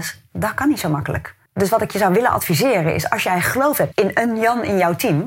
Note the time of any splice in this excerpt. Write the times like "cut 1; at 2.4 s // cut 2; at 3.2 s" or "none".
cut 1; at 1.5 s // cut 2; at 3.9 s